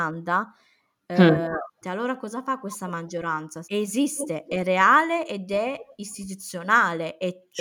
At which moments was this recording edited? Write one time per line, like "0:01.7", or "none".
0:01.8
0:03.6